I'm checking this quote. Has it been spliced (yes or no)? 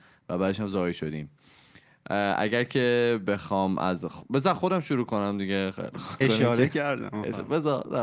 yes